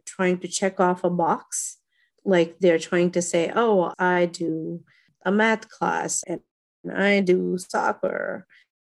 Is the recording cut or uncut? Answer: cut